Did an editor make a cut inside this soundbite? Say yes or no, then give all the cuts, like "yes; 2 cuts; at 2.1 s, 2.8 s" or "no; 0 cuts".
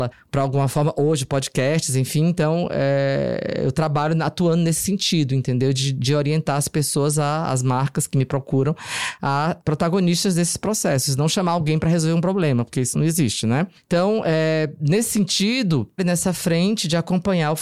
yes; 3 cuts; at 9.6 s, 12.9 s, 16.0 s